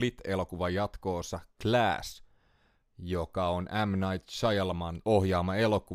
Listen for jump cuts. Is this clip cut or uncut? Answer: uncut